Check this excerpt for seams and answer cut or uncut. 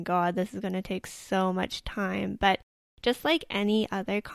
uncut